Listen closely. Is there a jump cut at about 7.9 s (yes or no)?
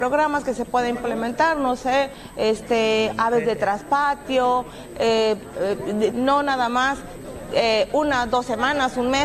no